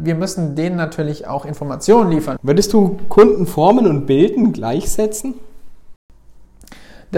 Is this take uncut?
no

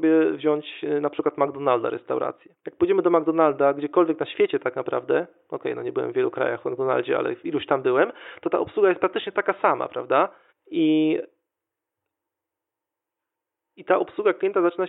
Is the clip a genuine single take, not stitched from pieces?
no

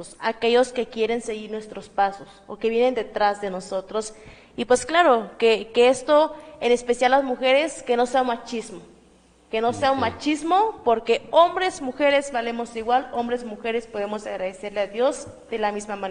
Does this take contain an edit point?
no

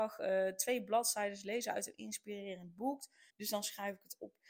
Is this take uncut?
no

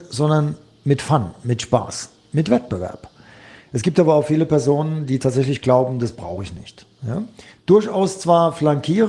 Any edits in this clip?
yes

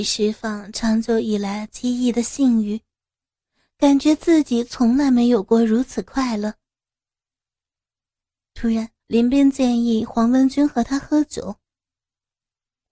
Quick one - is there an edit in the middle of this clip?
yes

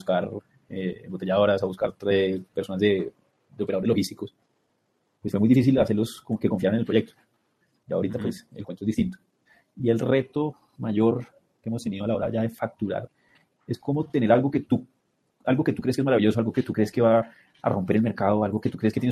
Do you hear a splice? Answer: no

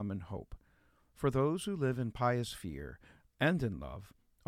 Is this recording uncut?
yes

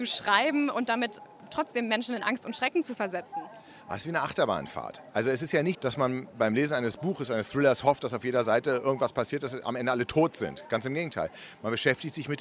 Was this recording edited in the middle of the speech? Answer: yes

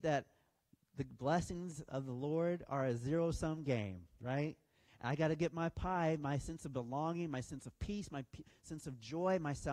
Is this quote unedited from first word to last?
no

